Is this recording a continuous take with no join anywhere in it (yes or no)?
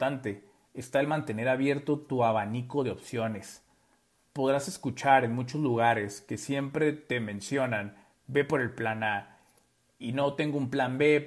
yes